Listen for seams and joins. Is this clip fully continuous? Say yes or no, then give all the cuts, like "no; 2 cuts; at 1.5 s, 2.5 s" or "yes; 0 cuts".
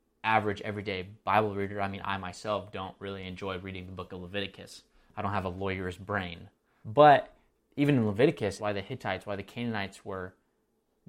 no; 2 cuts; at 6.8 s, 8.6 s